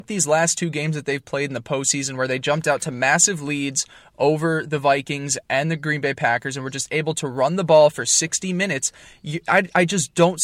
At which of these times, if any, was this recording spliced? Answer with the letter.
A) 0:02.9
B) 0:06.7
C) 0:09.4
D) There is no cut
D